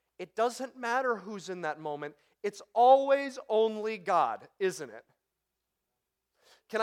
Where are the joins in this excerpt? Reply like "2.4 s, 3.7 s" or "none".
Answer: none